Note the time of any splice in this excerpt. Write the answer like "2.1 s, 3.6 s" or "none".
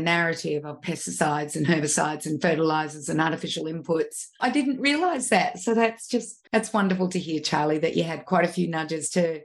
4.4 s, 6.5 s